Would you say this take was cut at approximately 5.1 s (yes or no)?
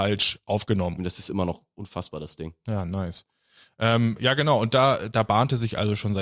no